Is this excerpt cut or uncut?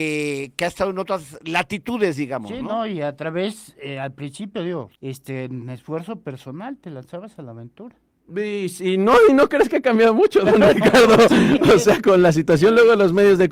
cut